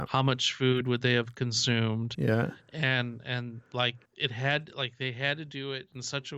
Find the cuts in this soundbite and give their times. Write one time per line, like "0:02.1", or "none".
0:02.1
0:04.1